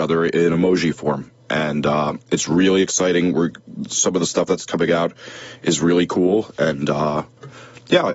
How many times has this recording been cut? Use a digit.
0